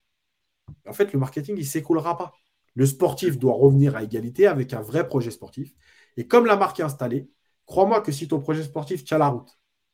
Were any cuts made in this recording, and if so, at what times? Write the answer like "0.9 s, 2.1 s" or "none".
2.6 s